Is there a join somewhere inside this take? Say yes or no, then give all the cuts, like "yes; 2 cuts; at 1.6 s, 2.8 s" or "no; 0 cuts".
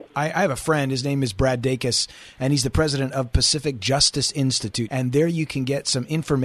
yes; 1 cut; at 4.9 s